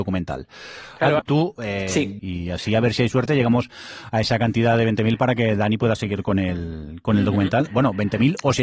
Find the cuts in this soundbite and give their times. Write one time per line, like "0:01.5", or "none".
0:01.2
0:02.2